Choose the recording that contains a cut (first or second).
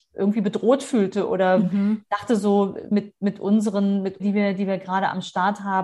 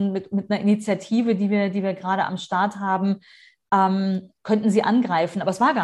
first